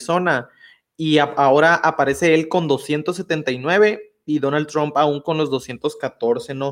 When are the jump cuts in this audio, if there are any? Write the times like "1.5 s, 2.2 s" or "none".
none